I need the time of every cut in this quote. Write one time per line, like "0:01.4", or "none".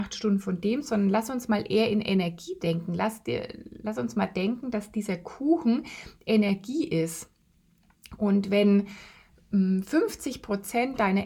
none